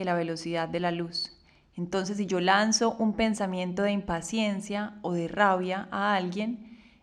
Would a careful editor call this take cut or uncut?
uncut